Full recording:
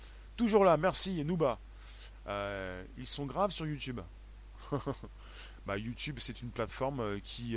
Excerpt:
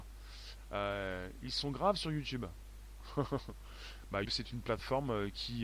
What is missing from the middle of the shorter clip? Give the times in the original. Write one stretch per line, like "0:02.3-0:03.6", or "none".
0:05.8-0:06.1